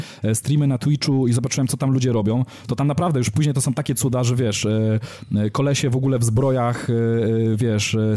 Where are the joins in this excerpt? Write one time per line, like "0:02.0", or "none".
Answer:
none